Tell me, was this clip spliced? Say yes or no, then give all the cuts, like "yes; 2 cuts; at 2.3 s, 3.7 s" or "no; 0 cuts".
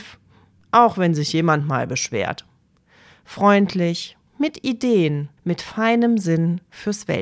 yes; 2 cuts; at 4.3 s, 5.4 s